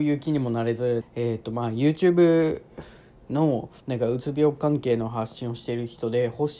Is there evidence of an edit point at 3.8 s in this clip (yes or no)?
yes